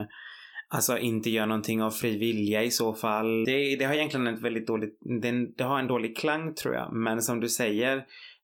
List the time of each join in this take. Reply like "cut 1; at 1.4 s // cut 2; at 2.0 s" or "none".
cut 1; at 3.5 s